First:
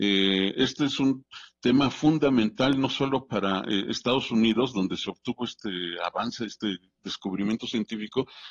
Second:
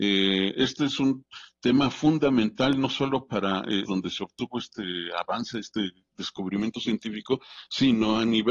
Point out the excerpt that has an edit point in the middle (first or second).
second